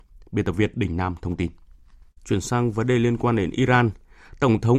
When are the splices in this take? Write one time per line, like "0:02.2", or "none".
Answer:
0:02.2